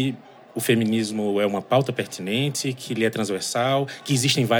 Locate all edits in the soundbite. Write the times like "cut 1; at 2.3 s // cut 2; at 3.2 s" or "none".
none